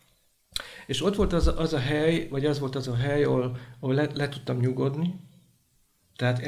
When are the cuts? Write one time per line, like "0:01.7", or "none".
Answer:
none